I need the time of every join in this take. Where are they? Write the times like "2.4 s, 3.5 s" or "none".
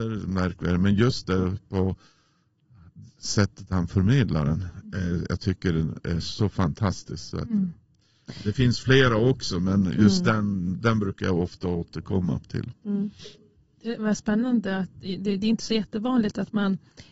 none